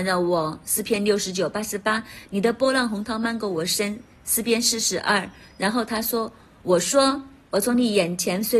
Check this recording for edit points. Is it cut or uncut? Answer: uncut